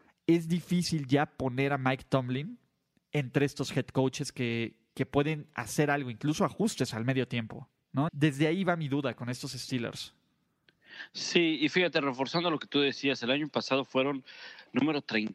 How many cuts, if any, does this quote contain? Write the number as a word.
one